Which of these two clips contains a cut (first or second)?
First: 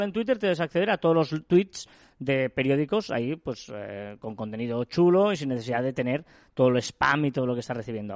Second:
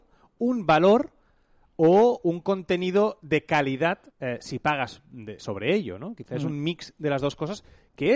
second